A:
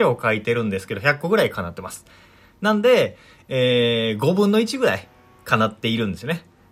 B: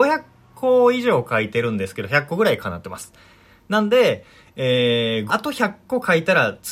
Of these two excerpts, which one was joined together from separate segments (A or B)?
B